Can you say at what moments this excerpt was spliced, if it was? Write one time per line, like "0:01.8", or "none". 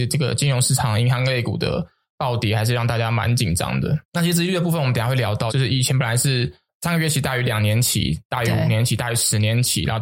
0:04.0
0:05.5